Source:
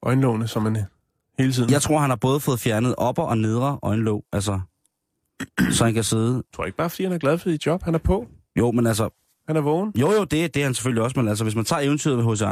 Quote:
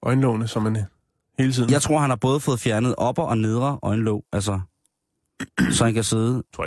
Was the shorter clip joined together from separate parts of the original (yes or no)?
no